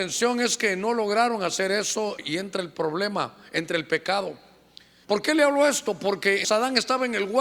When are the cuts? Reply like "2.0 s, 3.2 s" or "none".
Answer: 2.2 s, 5.0 s, 6.4 s